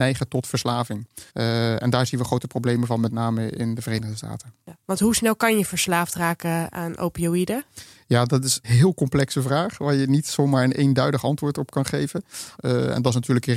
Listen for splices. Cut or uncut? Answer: cut